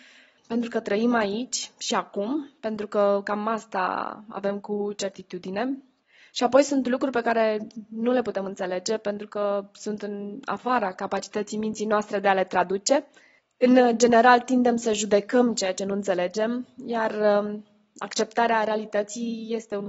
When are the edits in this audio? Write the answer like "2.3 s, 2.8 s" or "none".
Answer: none